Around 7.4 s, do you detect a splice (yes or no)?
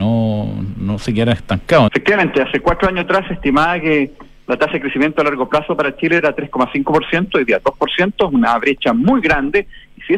no